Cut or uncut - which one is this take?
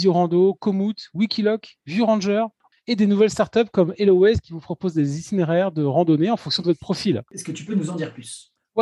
cut